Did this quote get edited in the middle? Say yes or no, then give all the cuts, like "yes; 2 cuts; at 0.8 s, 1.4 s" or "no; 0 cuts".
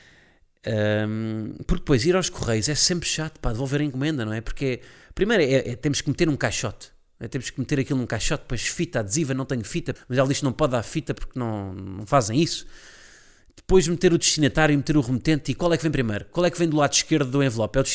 yes; 1 cut; at 10.0 s